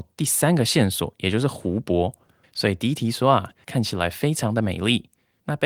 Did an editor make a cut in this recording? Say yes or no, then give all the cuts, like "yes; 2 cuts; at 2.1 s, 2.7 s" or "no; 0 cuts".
yes; 2 cuts; at 2.4 s, 3.6 s